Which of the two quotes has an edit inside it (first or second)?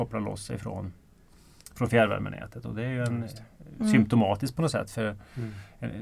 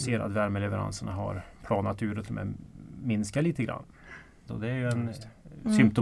second